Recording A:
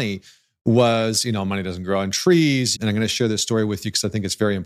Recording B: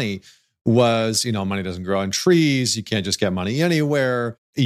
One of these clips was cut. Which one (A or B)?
A